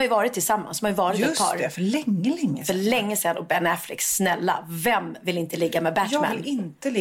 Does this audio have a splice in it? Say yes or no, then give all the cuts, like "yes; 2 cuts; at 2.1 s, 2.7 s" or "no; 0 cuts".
no; 0 cuts